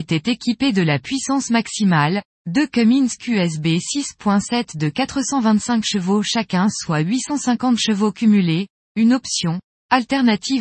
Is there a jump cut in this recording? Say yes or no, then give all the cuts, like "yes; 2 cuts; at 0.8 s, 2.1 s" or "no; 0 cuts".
no; 0 cuts